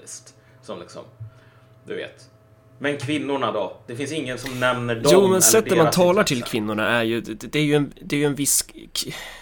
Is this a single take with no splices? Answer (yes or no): yes